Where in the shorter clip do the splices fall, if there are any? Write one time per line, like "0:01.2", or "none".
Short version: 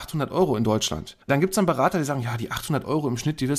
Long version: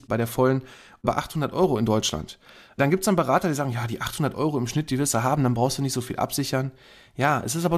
0:01.2